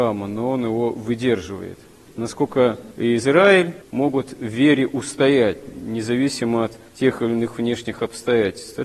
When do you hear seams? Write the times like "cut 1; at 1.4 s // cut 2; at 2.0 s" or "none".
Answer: cut 1; at 2.1 s